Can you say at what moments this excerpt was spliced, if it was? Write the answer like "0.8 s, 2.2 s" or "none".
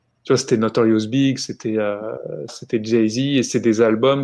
2.5 s